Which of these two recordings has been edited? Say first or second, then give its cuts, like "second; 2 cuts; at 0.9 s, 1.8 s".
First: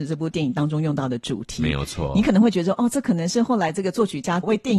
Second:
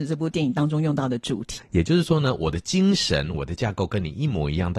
second; 2 cuts; at 1.6 s, 3.3 s